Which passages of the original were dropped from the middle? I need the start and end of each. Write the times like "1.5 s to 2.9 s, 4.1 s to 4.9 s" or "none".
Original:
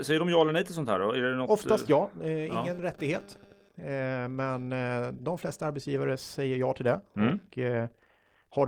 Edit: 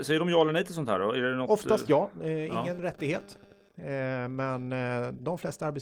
none